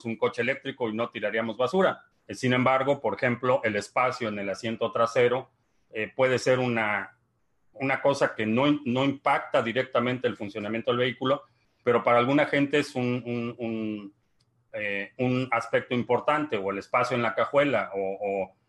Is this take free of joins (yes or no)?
no